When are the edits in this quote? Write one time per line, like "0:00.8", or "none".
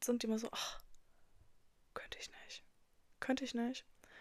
none

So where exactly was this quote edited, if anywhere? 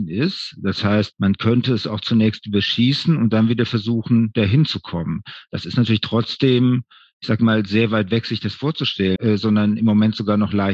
0:09.2

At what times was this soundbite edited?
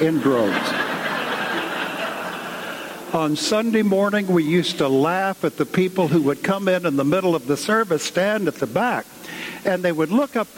0:09.6

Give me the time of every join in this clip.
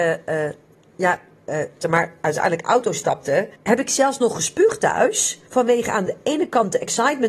0:01.8
0:03.6
0:05.5

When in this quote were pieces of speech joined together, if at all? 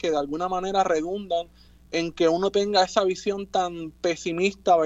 none

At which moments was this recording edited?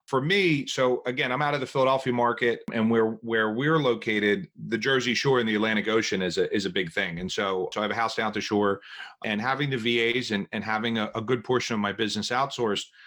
none

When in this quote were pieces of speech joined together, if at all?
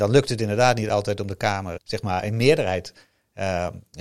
0:01.8

